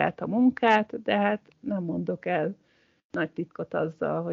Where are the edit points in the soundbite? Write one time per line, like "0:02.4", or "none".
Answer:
none